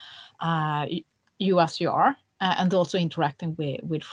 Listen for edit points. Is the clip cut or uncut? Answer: uncut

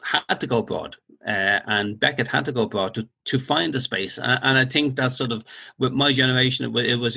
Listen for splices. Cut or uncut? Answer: uncut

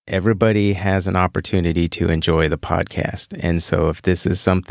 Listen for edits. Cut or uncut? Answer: uncut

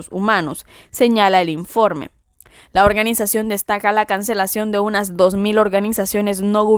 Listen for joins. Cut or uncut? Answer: uncut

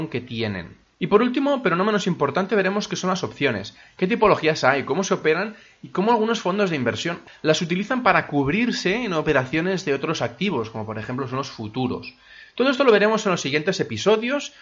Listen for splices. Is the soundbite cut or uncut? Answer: uncut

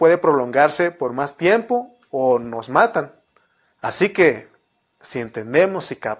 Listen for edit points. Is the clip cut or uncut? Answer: cut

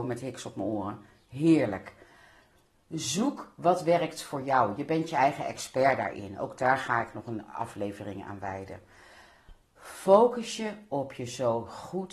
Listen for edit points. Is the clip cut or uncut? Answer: uncut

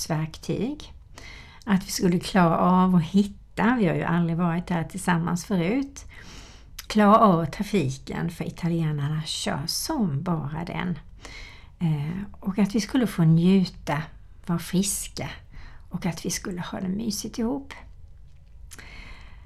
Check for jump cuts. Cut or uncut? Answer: cut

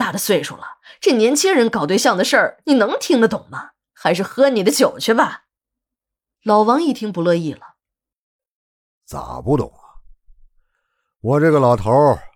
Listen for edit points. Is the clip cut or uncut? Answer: uncut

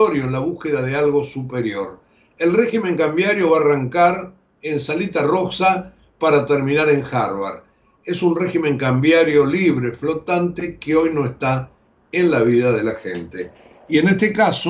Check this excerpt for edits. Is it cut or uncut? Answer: uncut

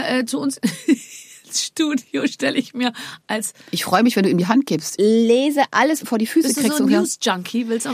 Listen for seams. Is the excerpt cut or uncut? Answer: cut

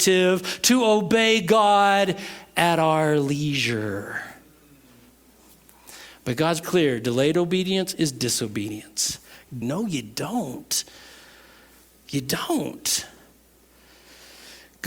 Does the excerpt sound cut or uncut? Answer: cut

